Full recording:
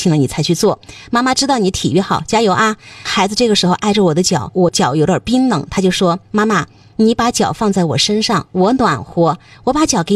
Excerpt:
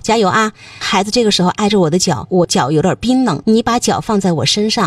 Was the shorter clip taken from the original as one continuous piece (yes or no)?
no